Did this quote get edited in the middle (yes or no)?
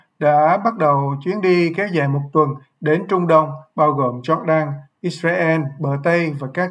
no